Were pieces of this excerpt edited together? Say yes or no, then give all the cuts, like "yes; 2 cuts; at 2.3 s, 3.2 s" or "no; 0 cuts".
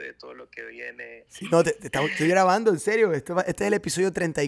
yes; 1 cut; at 1.3 s